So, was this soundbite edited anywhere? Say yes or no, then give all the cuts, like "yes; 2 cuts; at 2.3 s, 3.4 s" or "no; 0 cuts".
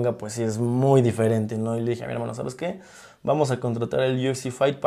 no; 0 cuts